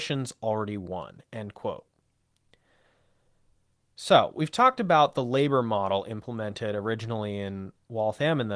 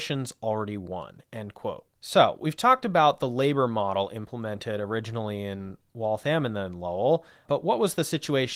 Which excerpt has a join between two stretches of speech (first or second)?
second